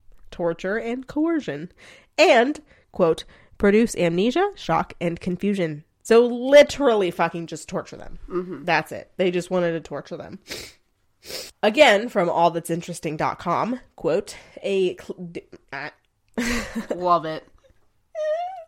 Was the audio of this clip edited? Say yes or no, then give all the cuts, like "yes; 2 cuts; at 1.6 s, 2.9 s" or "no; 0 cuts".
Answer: yes; 1 cut; at 11.5 s